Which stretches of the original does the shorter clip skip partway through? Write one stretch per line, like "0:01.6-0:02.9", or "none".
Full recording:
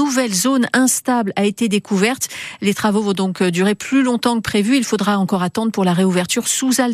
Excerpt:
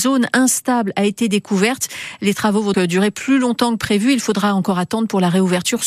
0:03.1-0:03.4